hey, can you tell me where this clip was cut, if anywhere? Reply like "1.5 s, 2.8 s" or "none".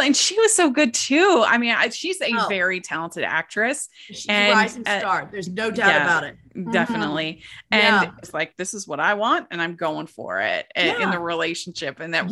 8.2 s